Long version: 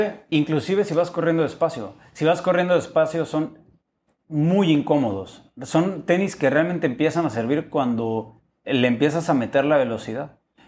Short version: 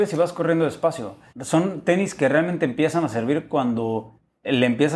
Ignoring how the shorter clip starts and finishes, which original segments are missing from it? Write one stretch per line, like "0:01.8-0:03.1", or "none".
0:02.1-0:05.5